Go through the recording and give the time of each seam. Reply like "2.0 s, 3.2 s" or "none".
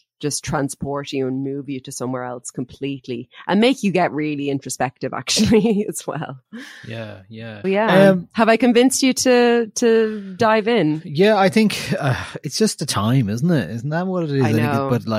7.6 s